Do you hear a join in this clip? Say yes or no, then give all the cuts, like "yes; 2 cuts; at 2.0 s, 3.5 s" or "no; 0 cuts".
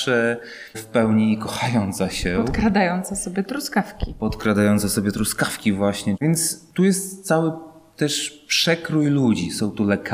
no; 0 cuts